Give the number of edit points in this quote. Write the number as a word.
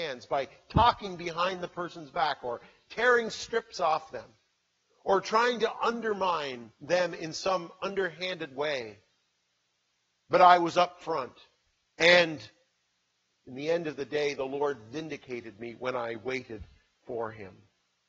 one